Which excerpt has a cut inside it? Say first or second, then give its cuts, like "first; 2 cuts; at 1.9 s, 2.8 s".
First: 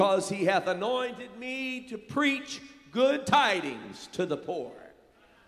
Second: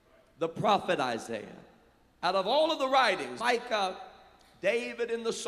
second; 1 cut; at 3.4 s